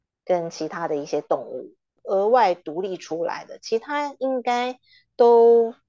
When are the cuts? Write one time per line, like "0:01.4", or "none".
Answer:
0:02.0